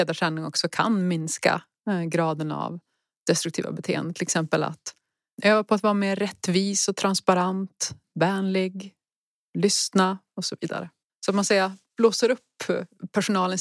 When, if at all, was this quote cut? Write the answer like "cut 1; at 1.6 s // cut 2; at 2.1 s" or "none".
cut 1; at 11.1 s